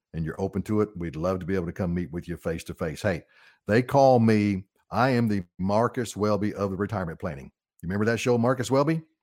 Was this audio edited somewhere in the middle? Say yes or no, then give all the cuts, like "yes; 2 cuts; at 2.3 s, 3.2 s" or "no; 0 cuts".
no; 0 cuts